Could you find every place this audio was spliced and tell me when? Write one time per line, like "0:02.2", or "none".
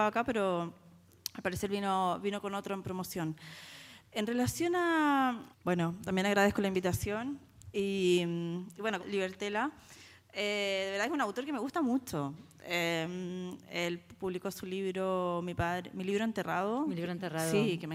0:05.5
0:09.0